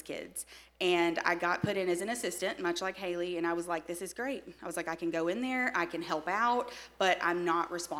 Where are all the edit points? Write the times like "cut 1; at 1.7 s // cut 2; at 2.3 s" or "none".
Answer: none